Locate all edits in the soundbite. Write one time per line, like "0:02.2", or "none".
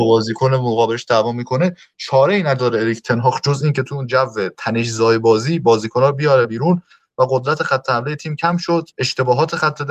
0:08.9